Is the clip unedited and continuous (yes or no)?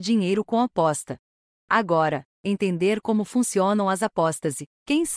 no